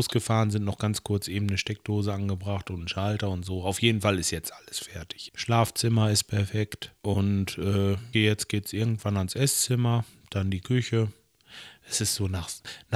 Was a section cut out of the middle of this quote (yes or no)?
yes